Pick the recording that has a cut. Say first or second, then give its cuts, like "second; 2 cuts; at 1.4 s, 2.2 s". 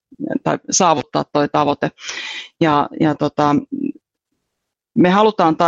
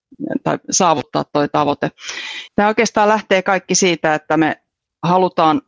second; 1 cut; at 2.5 s